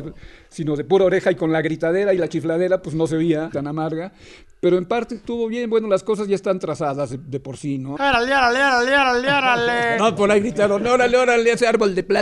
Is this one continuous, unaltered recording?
no; 2 cuts; at 3.5 s, 8.0 s

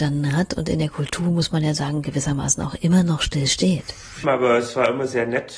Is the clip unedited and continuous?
no; 1 cut; at 4.2 s

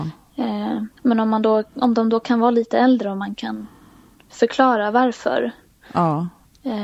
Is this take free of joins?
no; 1 cut; at 1.0 s

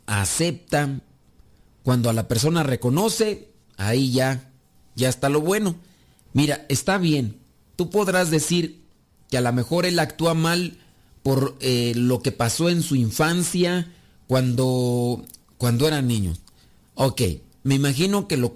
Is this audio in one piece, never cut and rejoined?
no; 1 cut; at 6.3 s

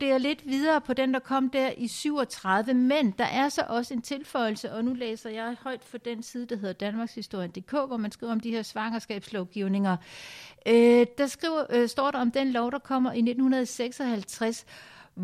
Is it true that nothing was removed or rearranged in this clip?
yes; 0 cuts

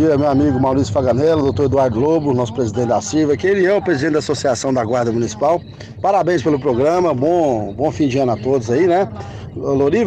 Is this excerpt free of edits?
yes; 0 cuts

